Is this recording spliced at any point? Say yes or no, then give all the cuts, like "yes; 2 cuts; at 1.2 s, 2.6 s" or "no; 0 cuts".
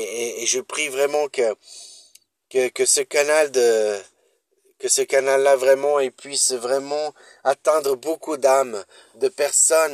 no; 0 cuts